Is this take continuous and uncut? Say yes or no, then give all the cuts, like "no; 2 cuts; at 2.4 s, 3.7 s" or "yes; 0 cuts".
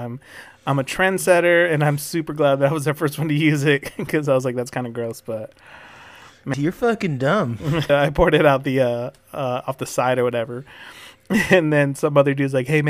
no; 2 cuts; at 6.5 s, 7.9 s